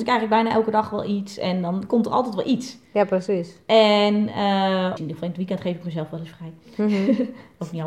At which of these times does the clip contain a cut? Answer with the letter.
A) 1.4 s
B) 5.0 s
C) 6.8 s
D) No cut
B